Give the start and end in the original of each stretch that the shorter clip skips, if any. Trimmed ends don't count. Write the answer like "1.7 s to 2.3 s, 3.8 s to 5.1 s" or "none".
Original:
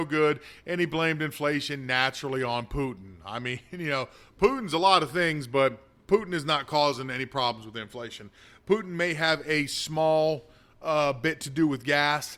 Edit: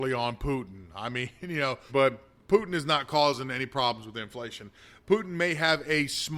4.2 s to 5.5 s